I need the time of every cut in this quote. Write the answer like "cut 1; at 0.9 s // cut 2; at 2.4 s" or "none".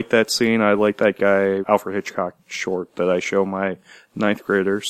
cut 1; at 1.6 s